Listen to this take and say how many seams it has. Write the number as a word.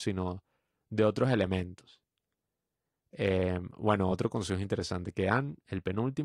zero